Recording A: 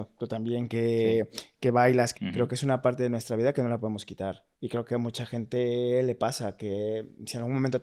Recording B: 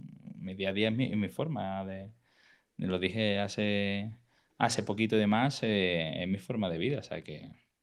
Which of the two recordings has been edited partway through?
A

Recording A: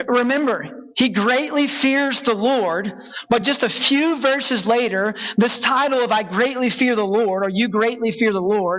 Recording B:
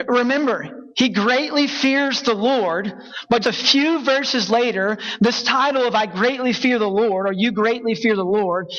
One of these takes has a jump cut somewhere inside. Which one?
B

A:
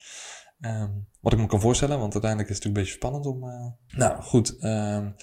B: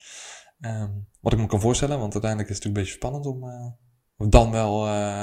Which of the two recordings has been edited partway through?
A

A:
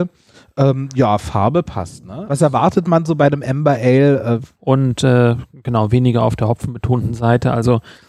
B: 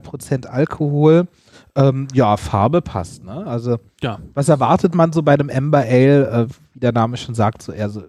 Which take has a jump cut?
A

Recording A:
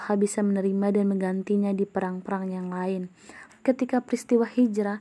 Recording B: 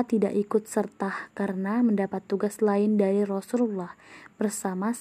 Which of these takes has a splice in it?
A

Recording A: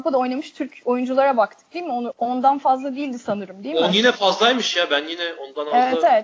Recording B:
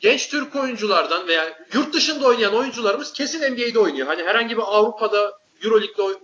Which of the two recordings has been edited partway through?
A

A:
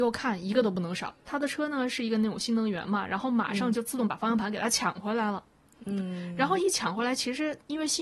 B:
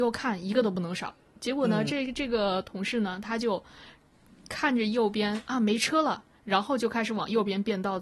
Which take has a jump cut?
A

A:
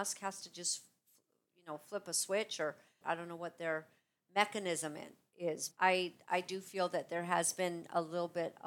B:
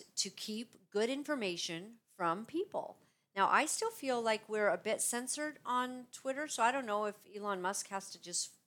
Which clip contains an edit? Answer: A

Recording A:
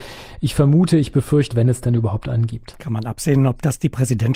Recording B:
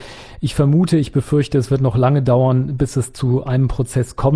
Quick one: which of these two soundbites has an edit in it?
A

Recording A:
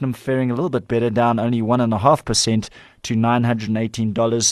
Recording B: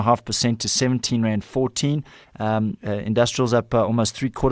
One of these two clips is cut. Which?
B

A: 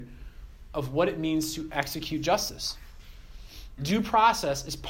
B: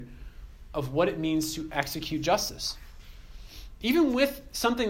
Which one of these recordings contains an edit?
A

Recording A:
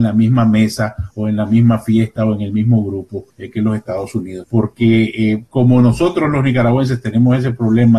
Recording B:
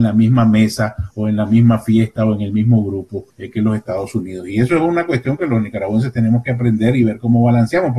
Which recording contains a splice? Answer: A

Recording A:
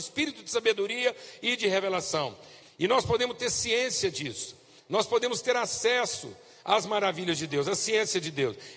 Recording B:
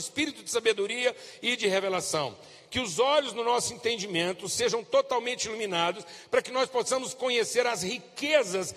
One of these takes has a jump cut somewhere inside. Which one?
A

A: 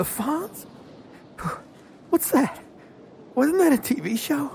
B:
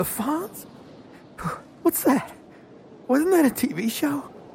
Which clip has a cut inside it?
B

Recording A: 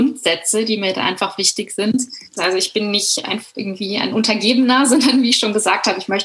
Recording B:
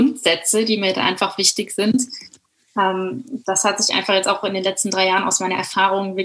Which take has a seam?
A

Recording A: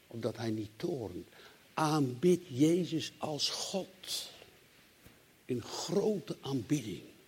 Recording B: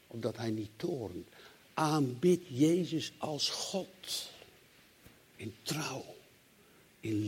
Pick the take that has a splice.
B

